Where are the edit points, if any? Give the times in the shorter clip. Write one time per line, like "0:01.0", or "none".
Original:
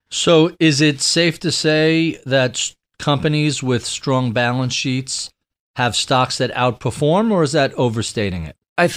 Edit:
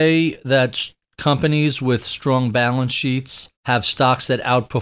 0:03.6